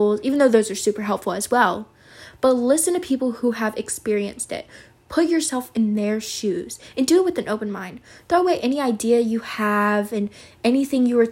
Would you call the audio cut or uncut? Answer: uncut